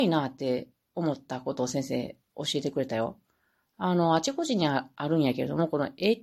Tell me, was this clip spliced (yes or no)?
no